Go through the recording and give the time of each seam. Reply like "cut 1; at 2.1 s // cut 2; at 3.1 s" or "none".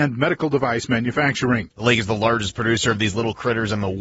cut 1; at 1.7 s